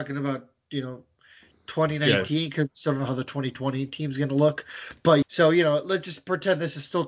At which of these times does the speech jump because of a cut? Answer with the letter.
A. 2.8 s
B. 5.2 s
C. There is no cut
B